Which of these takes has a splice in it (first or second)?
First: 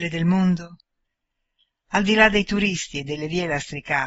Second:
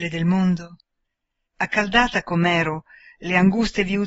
second